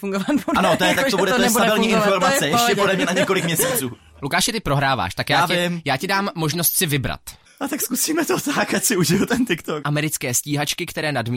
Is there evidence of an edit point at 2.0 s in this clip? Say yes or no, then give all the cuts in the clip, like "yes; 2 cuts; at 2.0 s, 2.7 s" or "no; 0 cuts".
no; 2 cuts; at 7.5 s, 9.8 s